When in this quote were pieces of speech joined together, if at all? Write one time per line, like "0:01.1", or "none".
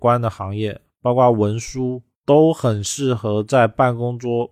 0:02.2